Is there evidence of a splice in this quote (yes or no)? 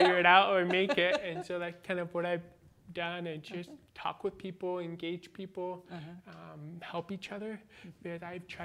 yes